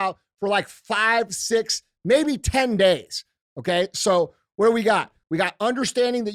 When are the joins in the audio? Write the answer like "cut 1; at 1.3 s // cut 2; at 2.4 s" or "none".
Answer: cut 1; at 3.4 s // cut 2; at 5.2 s